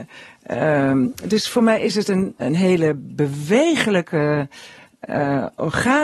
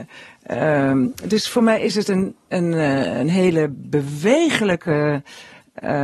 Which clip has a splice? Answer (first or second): first